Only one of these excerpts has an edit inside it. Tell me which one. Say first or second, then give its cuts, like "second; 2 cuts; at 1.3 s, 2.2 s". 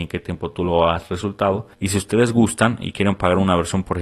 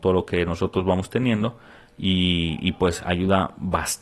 first; 1 cut; at 1.7 s